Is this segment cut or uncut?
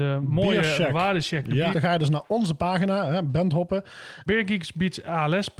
cut